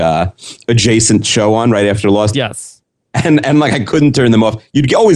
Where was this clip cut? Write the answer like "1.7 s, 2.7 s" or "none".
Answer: 2.3 s